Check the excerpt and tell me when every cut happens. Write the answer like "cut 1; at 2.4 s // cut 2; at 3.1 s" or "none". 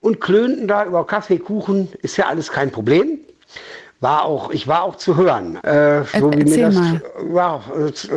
cut 1; at 5.6 s